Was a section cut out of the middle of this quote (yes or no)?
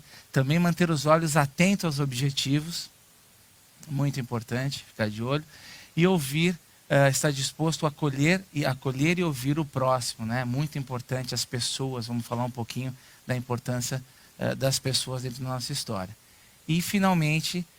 no